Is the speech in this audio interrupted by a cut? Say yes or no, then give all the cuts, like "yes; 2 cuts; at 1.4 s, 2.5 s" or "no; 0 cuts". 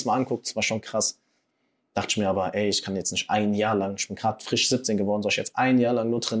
no; 0 cuts